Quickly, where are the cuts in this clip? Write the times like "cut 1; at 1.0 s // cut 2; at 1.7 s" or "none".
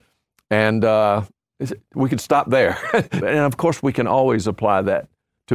cut 1; at 1.9 s // cut 2; at 3.2 s